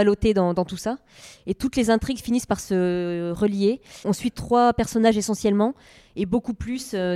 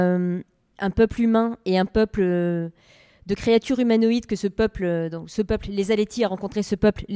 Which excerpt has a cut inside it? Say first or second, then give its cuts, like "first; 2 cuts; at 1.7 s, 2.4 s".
first; 1 cut; at 4.0 s